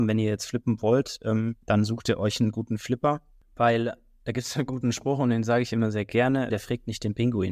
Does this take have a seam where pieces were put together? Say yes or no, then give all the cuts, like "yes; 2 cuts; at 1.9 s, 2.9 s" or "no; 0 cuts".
yes; 2 cuts; at 1.6 s, 6.5 s